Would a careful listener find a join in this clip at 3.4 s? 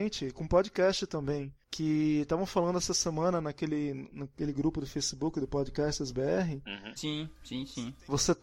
no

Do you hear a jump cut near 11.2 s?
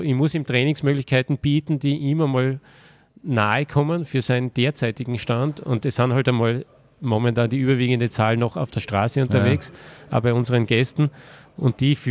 no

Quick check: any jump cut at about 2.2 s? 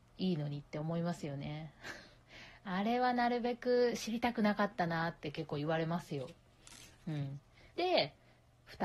no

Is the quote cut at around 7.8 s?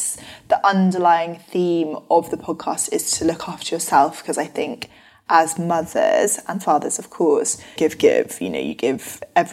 yes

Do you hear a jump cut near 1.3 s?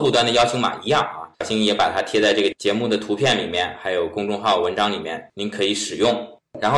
yes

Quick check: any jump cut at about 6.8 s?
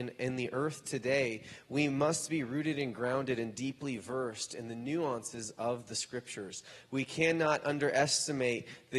no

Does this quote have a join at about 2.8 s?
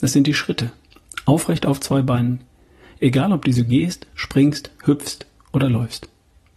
no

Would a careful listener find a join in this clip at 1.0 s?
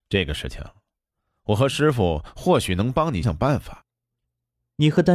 no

